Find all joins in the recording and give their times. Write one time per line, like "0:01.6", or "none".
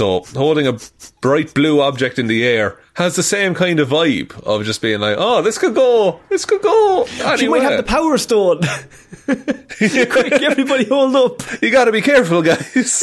none